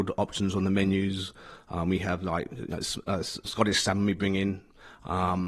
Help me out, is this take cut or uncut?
cut